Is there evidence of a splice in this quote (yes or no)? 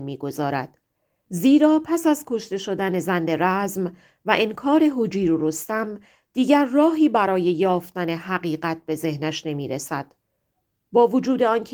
no